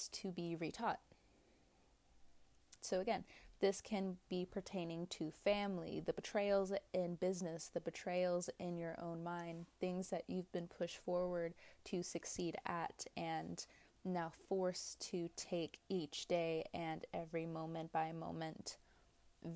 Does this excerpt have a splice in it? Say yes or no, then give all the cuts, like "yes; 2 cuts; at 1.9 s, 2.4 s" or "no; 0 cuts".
yes; 1 cut; at 2.8 s